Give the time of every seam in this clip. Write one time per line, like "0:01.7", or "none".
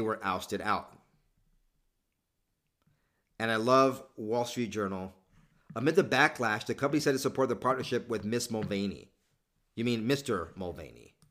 none

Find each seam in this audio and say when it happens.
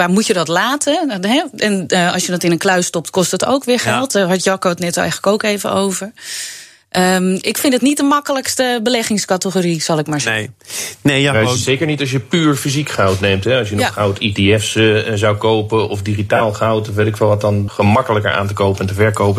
0:17.7

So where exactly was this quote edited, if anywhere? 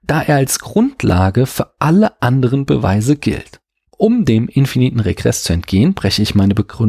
0:03.9

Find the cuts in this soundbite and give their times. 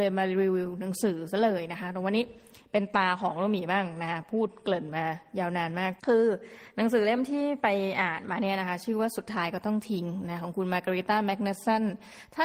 0:06.0

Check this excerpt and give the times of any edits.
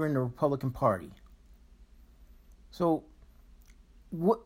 none

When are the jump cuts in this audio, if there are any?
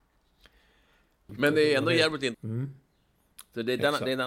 0:01.3
0:02.3

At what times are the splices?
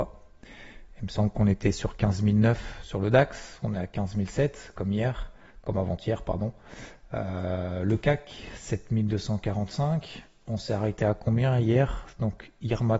none

